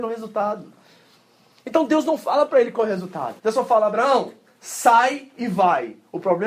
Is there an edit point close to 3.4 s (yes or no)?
yes